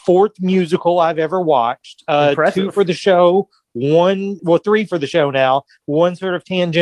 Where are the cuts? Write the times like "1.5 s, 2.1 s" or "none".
4.4 s